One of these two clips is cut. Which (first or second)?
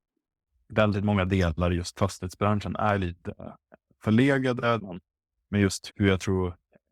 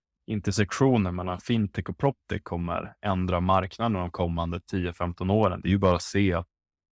first